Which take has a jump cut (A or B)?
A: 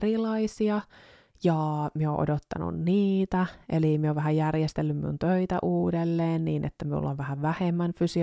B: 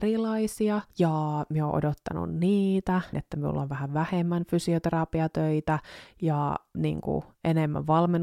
B